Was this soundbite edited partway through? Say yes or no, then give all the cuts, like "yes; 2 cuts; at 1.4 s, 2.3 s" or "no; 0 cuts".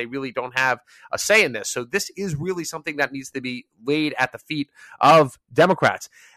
no; 0 cuts